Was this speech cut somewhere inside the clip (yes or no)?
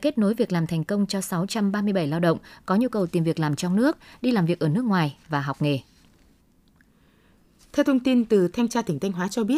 no